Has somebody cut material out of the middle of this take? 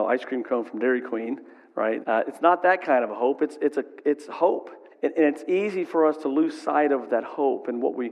yes; 2 cuts; at 2.0 s, 4.9 s

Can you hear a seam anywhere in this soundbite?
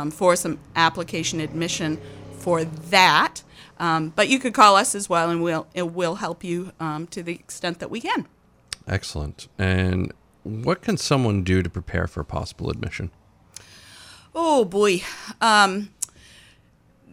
no; 0 cuts

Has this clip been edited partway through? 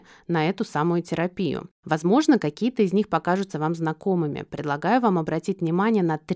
no; 0 cuts

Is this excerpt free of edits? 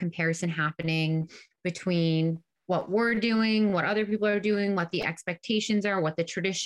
yes; 0 cuts

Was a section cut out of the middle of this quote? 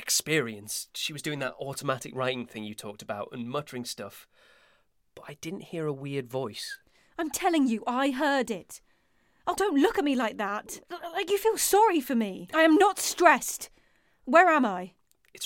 yes; 3 cuts; at 9.6 s, 10.8 s, 12.5 s

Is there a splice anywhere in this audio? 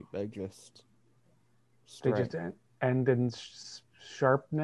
no; 0 cuts

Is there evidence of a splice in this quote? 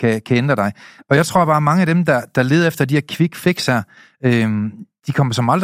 no; 0 cuts

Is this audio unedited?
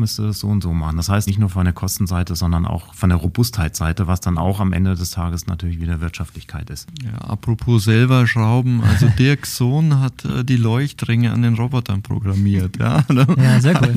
no; 1 cut; at 1.3 s

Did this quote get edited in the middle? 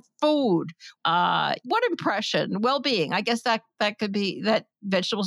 yes; 1 cut; at 1.0 s

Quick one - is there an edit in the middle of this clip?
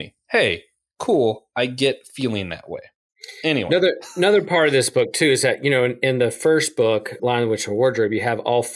yes; 1 cut; at 7.2 s

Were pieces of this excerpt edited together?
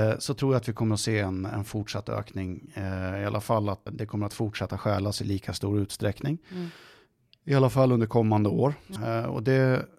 yes; 2 cuts; at 3.9 s, 9.0 s

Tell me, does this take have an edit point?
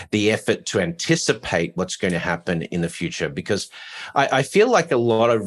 no; 0 cuts

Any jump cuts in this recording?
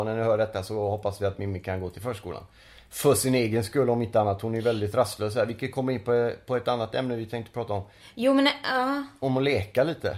no; 0 cuts

